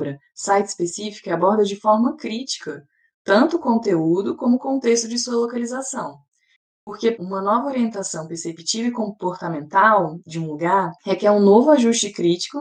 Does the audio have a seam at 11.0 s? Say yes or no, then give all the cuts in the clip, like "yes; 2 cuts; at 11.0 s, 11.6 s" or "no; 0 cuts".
yes; 2 cuts; at 7.1 s, 11.0 s